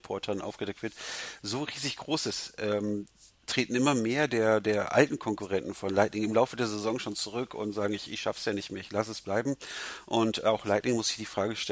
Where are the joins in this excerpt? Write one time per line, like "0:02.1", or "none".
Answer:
none